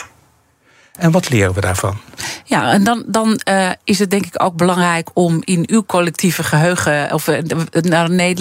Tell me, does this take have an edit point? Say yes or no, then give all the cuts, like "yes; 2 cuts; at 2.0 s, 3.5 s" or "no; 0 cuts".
no; 0 cuts